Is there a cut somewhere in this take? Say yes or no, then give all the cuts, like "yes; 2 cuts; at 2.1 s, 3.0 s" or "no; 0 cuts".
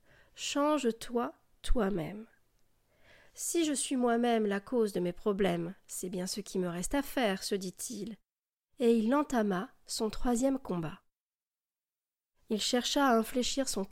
no; 0 cuts